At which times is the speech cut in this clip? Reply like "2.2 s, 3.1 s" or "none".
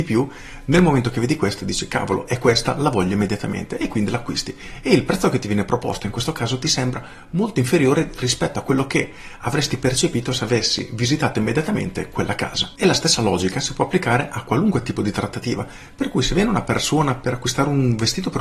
none